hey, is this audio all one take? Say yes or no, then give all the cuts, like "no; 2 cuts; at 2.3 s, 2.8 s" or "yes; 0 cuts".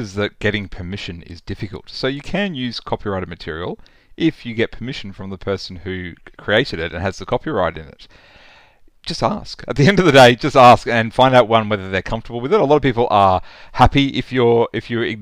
yes; 0 cuts